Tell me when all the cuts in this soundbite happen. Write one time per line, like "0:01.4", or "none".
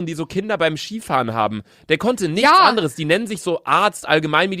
none

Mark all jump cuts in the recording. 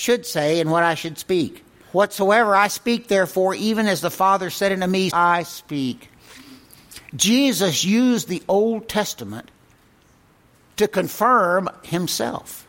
0:01.8
0:05.1

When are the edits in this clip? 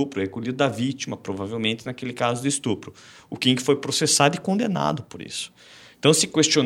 none

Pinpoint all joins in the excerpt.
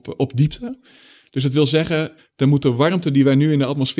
0:02.2

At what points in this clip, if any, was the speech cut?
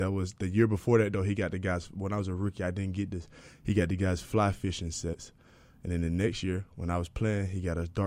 none

